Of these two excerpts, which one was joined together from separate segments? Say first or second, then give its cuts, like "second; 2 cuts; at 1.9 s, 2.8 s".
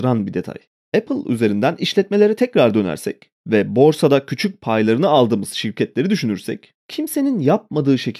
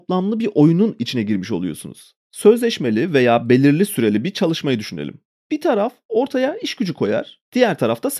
second; 1 cut; at 2.2 s